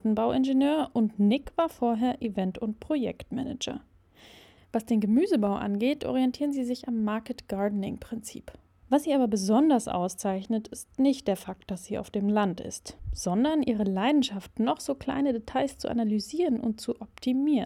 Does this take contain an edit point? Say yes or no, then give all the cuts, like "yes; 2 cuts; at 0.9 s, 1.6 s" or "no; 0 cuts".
yes; 2 cuts; at 4.6 s, 8.8 s